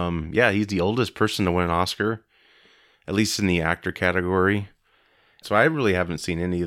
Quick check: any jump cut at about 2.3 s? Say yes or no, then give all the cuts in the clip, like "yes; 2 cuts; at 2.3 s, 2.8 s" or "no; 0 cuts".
no; 1 cut; at 5.4 s